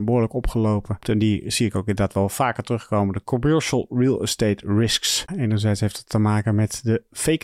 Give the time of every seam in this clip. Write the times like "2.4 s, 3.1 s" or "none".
1.0 s, 5.3 s